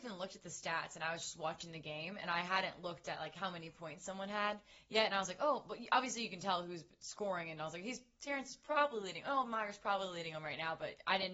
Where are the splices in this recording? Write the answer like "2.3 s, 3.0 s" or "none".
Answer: none